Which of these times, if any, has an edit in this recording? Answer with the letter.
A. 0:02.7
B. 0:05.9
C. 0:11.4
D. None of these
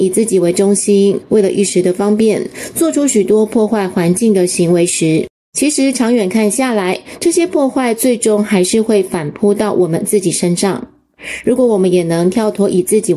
D